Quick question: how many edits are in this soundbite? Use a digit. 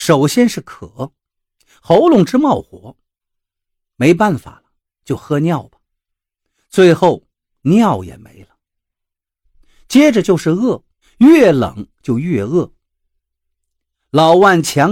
1